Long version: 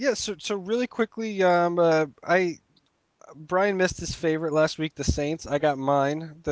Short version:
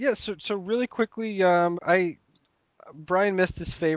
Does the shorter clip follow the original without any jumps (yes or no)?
no